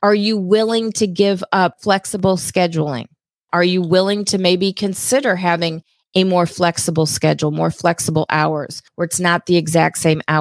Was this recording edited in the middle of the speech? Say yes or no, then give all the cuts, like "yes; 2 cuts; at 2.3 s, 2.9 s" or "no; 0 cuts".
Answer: no; 0 cuts